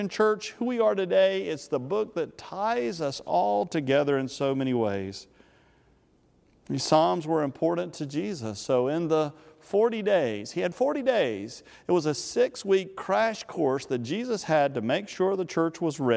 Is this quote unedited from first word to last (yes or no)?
yes